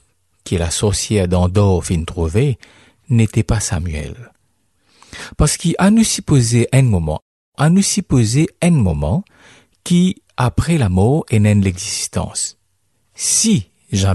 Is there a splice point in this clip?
yes; 1 cut; at 13.0 s

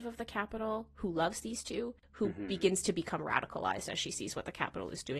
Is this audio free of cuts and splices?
yes; 0 cuts

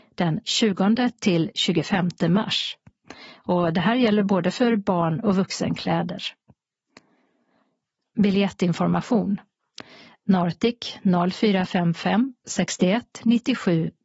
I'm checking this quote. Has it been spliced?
no; 0 cuts

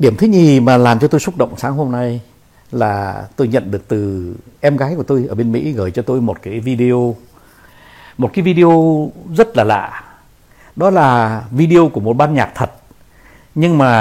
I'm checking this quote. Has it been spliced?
no; 0 cuts

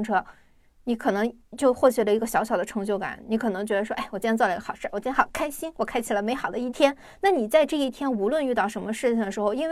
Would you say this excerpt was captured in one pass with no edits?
yes; 0 cuts

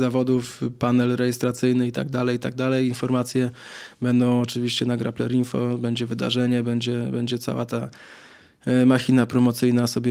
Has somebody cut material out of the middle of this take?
no; 0 cuts

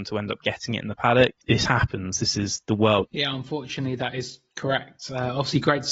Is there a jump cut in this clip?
yes; 2 cuts; at 1.4 s, 3.1 s

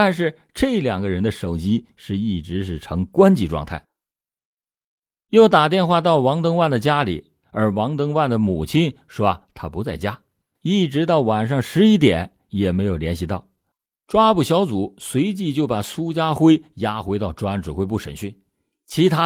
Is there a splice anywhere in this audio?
yes; 1 cut; at 14.0 s

